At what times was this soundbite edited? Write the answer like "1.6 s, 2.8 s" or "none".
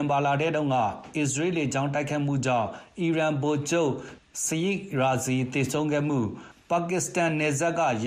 none